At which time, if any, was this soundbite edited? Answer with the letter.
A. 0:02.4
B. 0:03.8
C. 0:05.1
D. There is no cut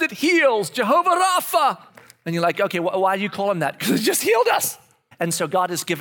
C